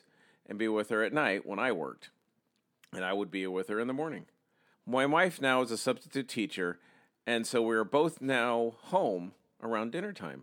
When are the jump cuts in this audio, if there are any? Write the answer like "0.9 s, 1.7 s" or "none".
4.7 s